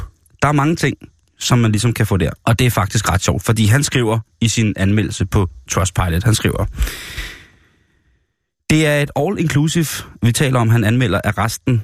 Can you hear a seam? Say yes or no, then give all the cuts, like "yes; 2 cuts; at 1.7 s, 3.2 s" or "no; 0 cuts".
yes; 1 cut; at 2.4 s